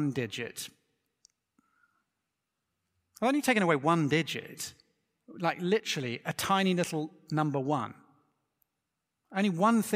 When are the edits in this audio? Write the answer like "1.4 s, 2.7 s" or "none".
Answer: none